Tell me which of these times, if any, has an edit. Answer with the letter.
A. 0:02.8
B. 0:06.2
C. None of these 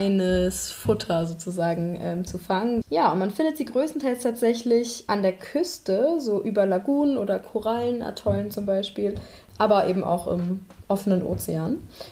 A